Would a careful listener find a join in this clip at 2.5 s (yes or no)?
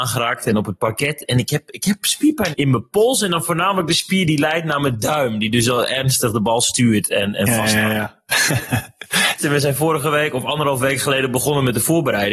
yes